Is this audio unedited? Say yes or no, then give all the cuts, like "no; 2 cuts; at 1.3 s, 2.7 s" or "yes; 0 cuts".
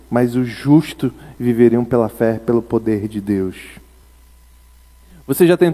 yes; 0 cuts